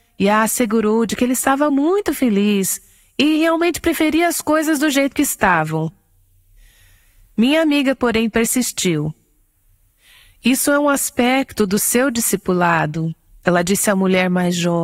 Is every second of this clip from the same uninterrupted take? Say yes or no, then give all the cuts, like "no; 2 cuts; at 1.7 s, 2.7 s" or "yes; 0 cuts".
yes; 0 cuts